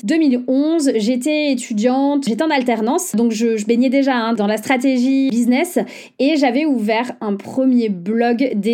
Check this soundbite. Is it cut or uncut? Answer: uncut